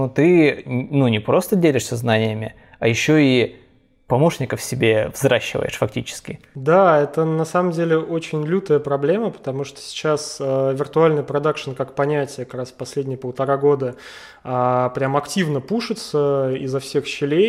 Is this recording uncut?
yes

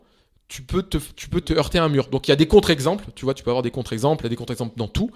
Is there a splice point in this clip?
yes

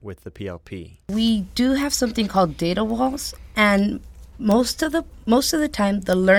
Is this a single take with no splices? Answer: yes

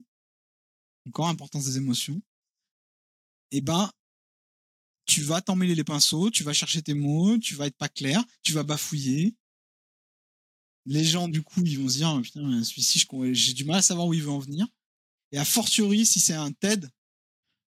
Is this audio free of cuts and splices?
no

